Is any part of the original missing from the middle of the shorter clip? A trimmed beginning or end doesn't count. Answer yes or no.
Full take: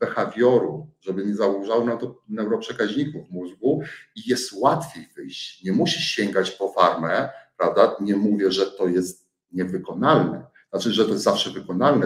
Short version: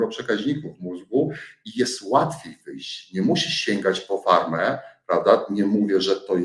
no